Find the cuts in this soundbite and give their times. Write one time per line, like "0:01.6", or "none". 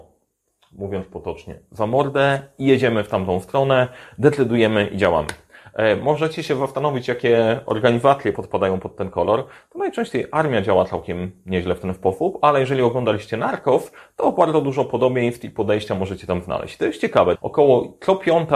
0:08.3
0:17.3